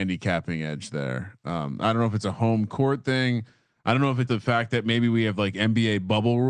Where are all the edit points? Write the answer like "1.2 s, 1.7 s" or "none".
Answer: 4.3 s